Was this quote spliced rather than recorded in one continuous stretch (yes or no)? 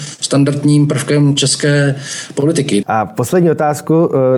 yes